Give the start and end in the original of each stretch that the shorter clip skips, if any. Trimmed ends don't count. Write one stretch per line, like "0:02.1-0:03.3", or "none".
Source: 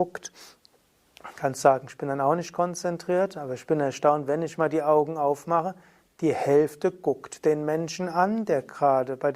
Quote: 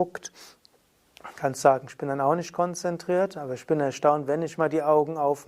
none